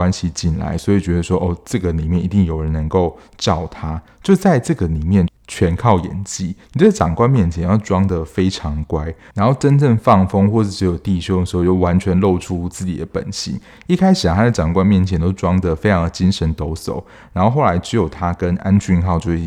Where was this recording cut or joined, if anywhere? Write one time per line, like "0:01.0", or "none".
0:05.3